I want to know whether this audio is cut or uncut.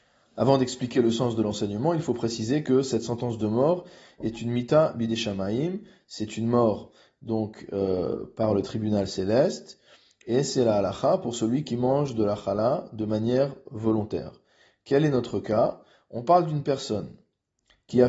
uncut